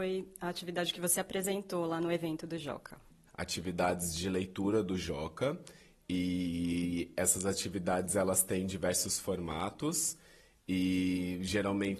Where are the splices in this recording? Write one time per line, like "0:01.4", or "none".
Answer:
0:03.3